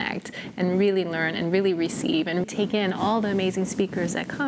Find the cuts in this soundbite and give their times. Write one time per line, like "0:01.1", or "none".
0:02.4